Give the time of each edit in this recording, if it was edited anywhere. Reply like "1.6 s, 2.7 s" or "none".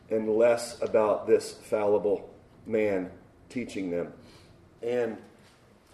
4.8 s